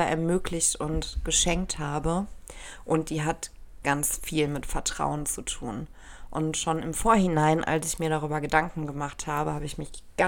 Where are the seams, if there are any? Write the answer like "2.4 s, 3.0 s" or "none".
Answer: 3.8 s